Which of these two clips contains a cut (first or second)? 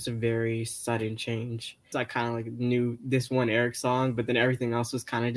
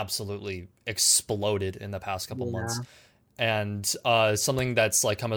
first